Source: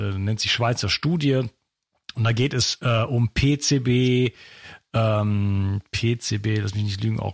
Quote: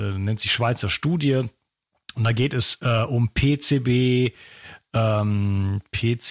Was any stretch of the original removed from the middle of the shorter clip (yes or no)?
no